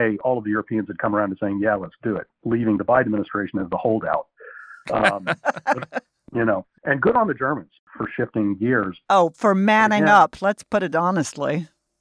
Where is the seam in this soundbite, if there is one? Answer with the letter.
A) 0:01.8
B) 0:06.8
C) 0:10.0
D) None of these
B